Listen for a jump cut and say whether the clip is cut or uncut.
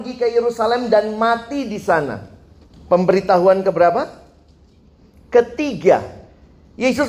cut